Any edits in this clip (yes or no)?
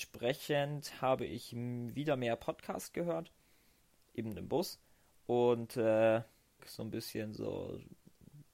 yes